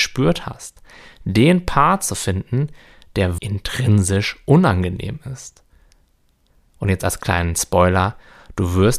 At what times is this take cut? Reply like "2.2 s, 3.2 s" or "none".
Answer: 3.4 s